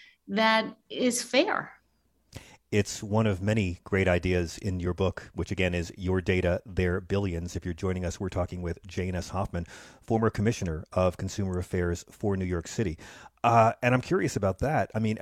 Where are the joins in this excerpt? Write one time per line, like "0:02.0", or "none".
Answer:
none